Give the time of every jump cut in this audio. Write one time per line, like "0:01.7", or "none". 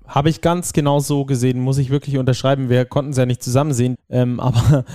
0:03.9